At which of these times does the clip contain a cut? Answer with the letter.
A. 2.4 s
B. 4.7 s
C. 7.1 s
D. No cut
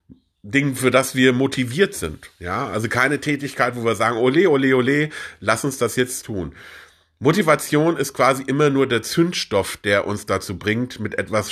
D